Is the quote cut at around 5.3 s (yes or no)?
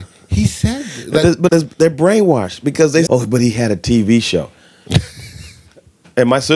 no